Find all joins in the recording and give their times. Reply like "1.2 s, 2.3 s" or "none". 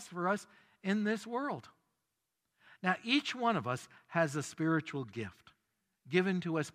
none